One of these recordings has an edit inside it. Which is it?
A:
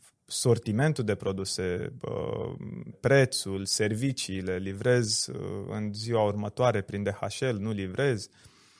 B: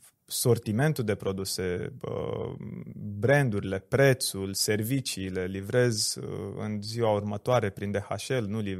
A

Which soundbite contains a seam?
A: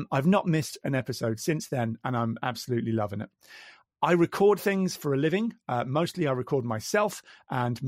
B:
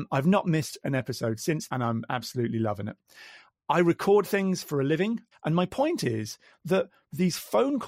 B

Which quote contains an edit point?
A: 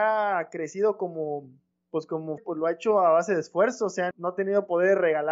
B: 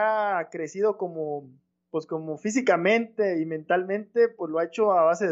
A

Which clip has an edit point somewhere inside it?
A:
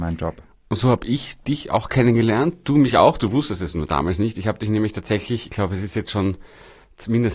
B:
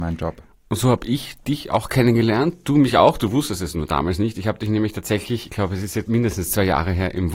B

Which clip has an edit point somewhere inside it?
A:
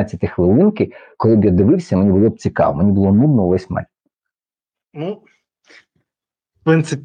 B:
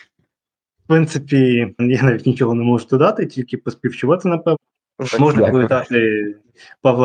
B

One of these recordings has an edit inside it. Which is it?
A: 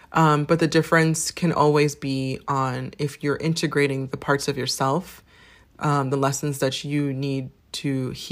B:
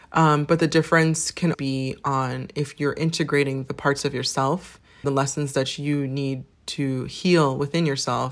B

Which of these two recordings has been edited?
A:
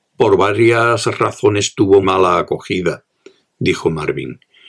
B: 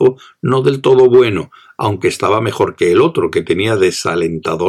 A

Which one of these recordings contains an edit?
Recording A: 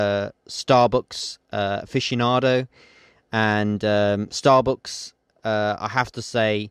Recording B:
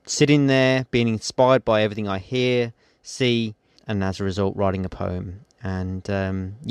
B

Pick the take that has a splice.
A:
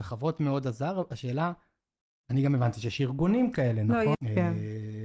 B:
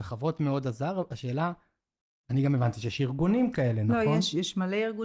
A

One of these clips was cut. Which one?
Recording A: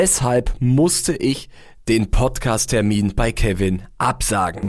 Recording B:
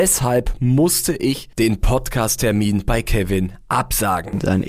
B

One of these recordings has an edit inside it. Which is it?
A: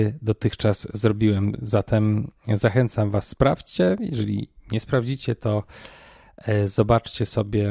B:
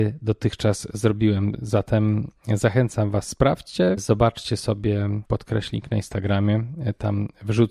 B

